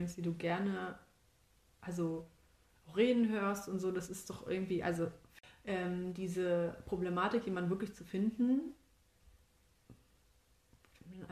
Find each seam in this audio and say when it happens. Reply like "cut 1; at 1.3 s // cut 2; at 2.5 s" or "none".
none